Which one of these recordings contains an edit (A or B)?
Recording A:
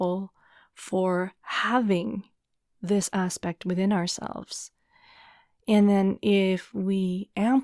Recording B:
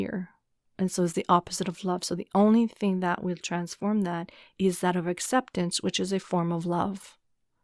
A